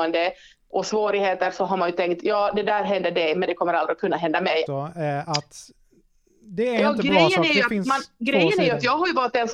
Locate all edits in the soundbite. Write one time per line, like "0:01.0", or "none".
0:04.7